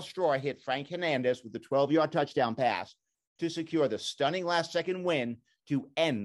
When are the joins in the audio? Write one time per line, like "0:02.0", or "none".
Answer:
none